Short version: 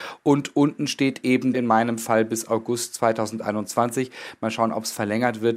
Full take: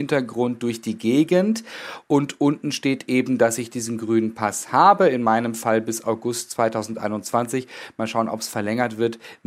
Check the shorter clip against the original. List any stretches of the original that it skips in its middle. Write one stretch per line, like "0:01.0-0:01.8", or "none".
0:03.4-0:05.1